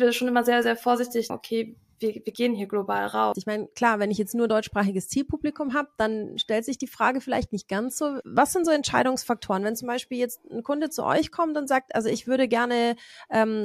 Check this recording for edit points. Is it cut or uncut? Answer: cut